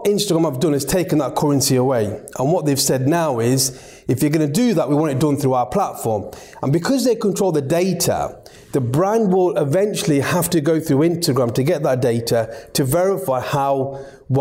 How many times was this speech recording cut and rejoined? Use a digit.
0